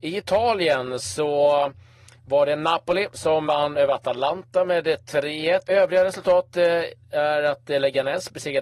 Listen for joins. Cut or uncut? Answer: cut